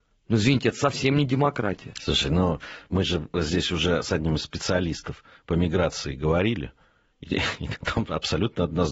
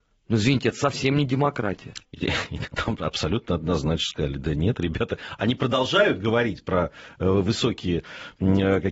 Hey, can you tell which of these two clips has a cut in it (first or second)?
second